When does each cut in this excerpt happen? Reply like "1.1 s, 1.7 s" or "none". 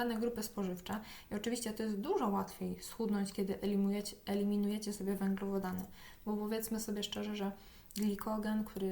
none